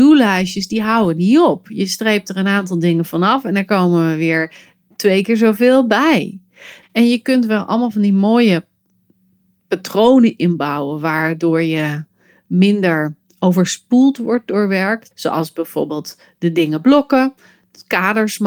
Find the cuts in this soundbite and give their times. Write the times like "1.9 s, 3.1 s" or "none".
6.8 s, 15.1 s

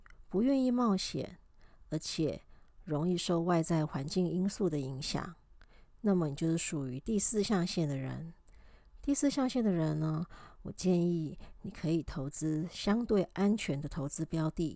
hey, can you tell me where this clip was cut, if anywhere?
none

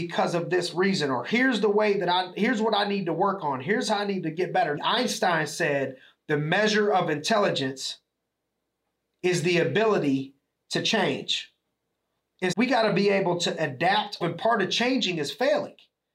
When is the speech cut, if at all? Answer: 4.8 s, 12.5 s, 14.2 s

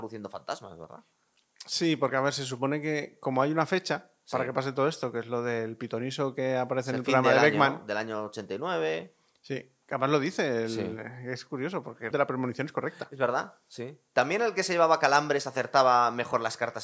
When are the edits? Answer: 12.1 s

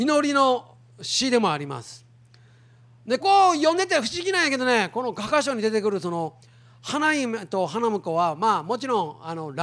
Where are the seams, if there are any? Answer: 3.2 s

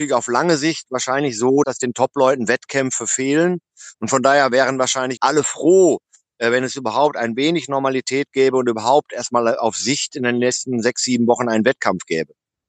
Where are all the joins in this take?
1.6 s, 3.9 s, 5.2 s

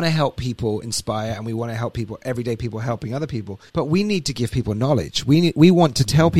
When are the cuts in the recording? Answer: 3.7 s

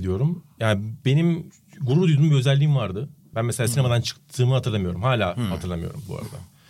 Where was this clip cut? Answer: 3.3 s

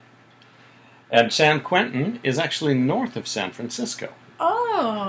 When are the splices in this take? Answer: none

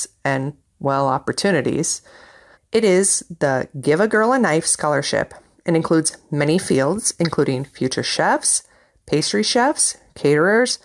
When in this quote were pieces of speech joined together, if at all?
2.5 s

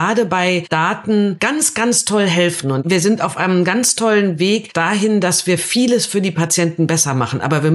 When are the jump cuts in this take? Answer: none

